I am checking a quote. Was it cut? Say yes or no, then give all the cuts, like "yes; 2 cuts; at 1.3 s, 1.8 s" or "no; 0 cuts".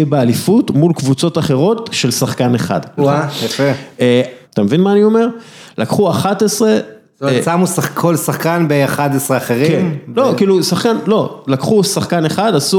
yes; 2 cuts; at 3.0 s, 4.4 s